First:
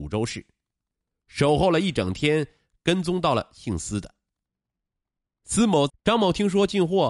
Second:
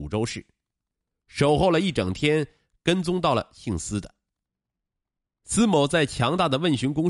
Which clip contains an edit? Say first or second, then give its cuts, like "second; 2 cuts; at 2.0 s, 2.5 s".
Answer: first; 1 cut; at 5.9 s